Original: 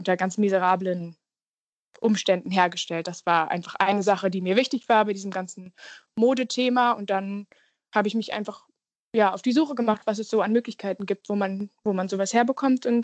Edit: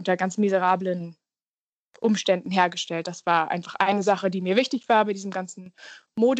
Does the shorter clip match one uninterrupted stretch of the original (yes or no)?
yes